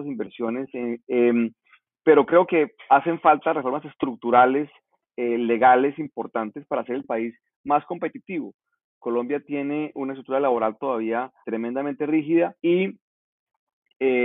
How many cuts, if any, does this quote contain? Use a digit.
3